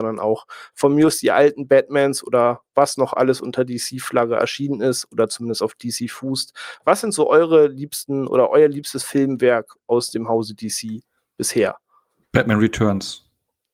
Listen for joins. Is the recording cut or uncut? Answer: uncut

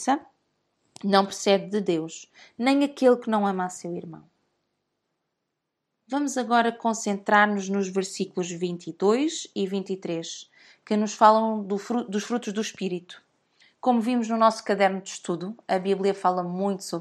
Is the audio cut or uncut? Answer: uncut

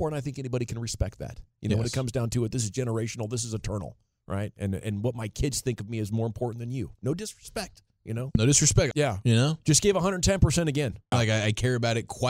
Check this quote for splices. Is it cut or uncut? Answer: cut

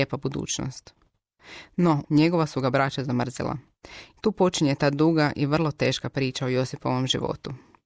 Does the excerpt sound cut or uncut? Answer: cut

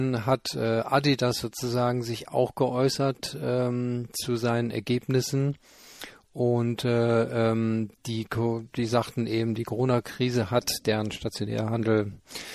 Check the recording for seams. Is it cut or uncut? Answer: uncut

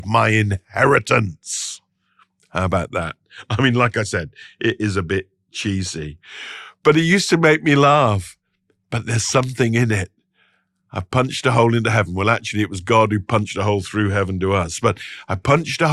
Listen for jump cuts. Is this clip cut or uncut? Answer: uncut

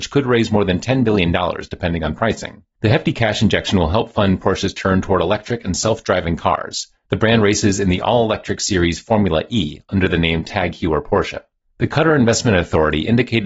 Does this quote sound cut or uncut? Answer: uncut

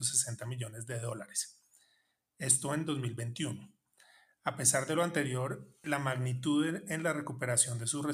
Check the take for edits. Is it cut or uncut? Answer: uncut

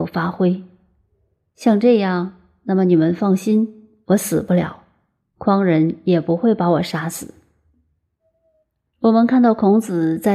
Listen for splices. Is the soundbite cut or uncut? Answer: uncut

